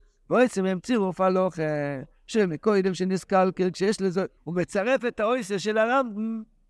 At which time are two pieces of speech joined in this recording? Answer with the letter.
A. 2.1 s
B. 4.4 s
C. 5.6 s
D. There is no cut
B